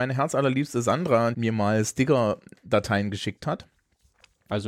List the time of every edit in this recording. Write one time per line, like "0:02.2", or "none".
0:01.3